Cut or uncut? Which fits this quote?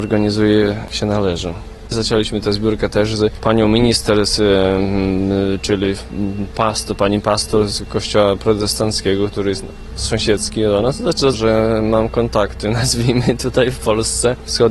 cut